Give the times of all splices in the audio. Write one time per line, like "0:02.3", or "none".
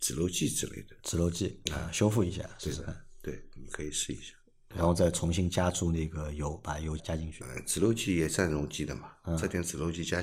0:07.0